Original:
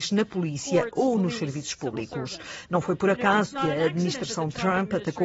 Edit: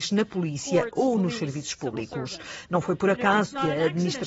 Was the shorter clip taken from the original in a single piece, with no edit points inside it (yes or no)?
yes